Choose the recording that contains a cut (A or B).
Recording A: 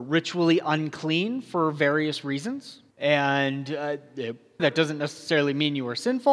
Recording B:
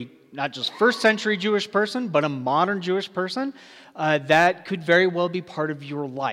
A